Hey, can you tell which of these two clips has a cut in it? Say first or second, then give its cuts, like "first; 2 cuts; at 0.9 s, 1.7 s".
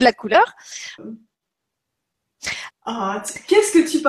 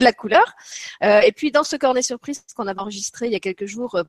first; 2 cuts; at 1.0 s, 2.7 s